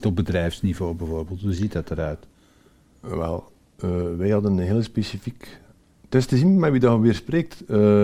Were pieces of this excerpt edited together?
no; 0 cuts

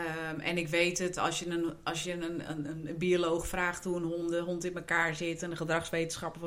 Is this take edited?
no; 0 cuts

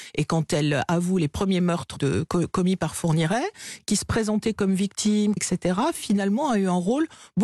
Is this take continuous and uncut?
no; 2 cuts; at 2.0 s, 5.4 s

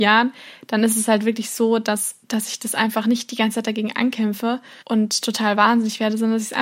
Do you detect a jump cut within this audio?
yes; 2 cuts; at 2.2 s, 4.8 s

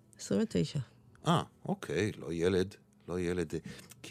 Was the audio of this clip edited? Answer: no; 0 cuts

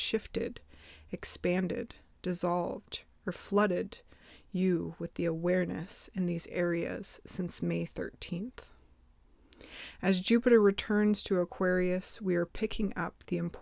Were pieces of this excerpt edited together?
no; 0 cuts

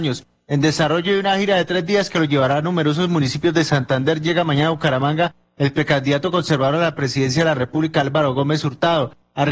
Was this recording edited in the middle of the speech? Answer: no; 0 cuts

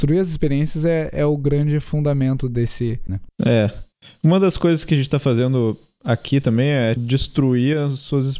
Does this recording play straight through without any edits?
no; 2 cuts; at 3.1 s, 7.0 s

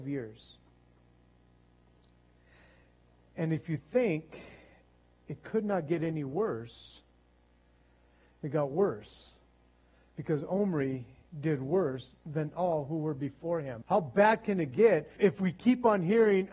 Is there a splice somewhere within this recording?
yes; 2 cuts; at 13.8 s, 15.2 s

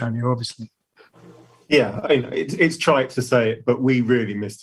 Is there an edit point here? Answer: yes; 1 cut; at 2.0 s

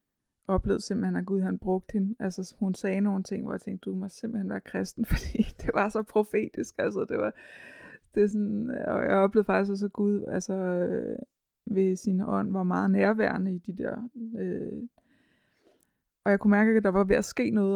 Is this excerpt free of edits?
yes; 0 cuts

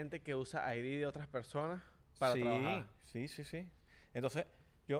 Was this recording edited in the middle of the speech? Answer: no; 0 cuts

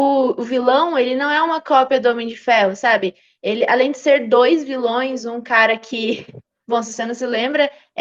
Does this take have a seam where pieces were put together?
no; 0 cuts

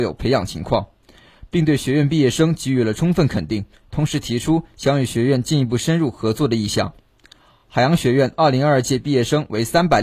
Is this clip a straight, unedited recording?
yes; 0 cuts

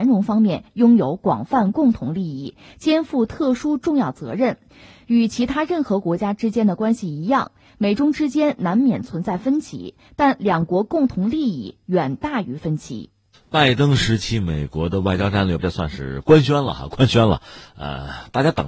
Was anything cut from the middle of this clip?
yes; 1 cut; at 15.6 s

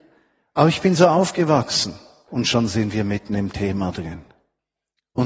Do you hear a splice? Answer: yes; 1 cut; at 2.3 s

